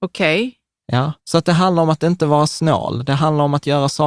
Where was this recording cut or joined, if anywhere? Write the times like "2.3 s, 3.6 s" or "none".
1.2 s